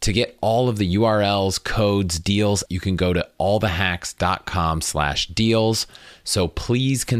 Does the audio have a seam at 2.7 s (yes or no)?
yes